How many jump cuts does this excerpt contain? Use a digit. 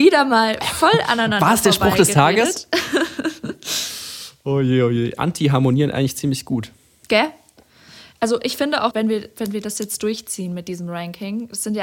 2